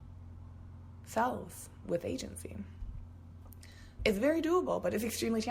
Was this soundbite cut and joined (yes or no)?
yes